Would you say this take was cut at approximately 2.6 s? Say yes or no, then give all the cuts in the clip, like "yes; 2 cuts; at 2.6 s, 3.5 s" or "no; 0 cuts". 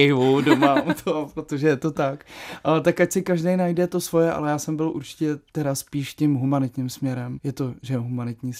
no; 2 cuts; at 5.5 s, 7.4 s